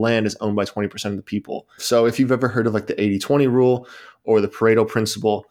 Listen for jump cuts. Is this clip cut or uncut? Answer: cut